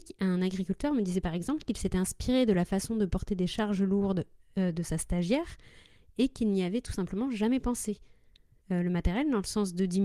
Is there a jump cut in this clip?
yes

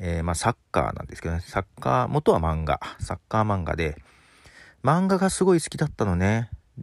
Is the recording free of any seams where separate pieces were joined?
yes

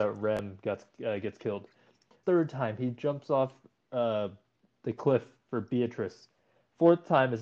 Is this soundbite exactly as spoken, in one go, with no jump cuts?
no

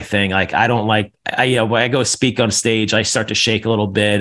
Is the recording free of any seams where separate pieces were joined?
yes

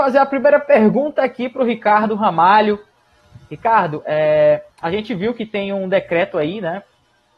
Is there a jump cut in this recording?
no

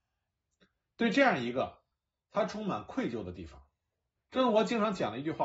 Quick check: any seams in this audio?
yes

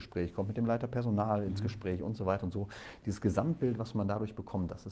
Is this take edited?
no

